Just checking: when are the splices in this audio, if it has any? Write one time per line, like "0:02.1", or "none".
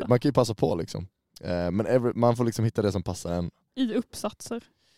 0:03.7